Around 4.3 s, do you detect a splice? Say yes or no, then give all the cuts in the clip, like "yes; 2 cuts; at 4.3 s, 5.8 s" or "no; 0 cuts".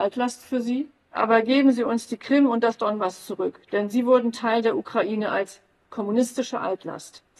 no; 1 cut; at 1.1 s